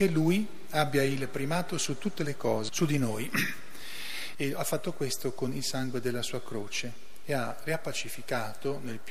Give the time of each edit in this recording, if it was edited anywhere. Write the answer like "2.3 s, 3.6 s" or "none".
2.7 s, 4.3 s